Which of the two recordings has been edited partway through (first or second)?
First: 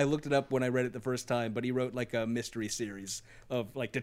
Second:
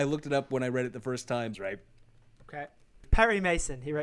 second